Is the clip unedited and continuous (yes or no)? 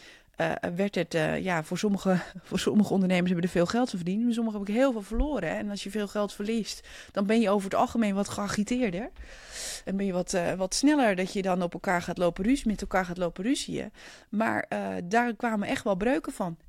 yes